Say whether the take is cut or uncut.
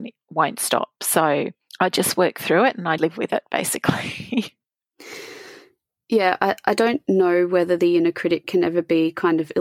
cut